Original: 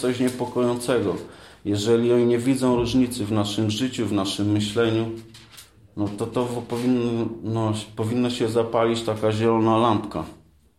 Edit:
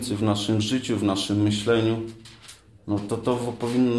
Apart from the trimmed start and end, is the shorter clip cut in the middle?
no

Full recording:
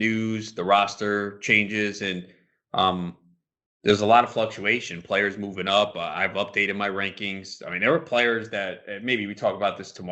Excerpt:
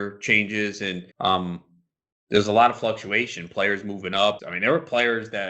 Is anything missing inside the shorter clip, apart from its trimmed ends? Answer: yes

